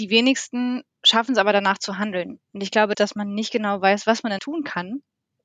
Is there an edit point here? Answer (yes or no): yes